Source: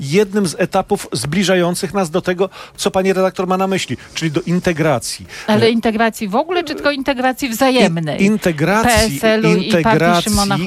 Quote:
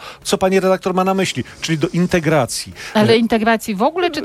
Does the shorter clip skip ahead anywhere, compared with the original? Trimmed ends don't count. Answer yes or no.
no